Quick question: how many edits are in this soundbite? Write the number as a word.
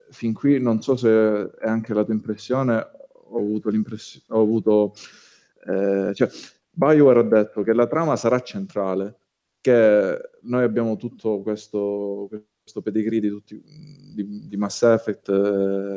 zero